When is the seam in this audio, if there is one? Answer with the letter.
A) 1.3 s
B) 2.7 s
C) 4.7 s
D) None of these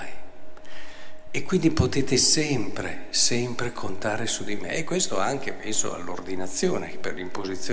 D